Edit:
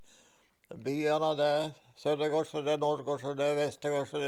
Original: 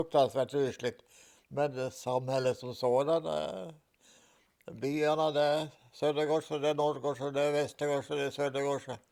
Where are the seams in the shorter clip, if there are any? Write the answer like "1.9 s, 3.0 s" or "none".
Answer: none